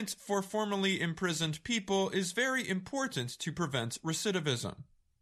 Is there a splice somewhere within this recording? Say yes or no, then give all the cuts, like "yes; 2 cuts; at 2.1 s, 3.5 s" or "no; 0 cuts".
no; 0 cuts